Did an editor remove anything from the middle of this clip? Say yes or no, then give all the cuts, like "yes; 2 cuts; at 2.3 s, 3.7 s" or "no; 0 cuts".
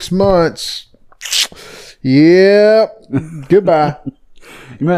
no; 0 cuts